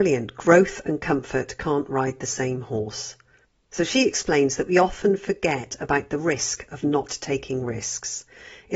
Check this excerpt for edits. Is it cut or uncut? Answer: uncut